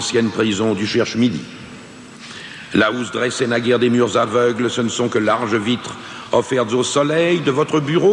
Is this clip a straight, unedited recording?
yes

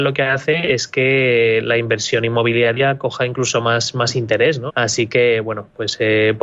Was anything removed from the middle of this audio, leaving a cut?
yes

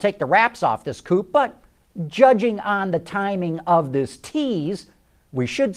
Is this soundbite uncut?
yes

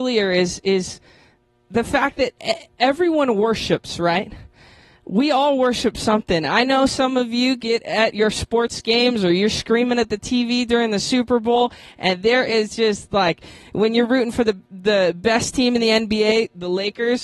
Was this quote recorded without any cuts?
yes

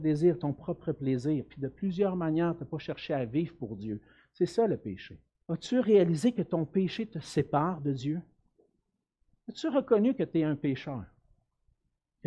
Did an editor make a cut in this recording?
yes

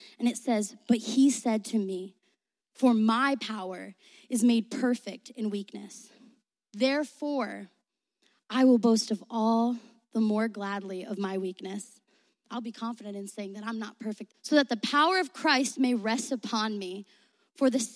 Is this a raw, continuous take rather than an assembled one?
no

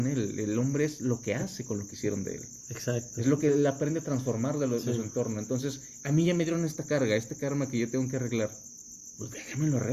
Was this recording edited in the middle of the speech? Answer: no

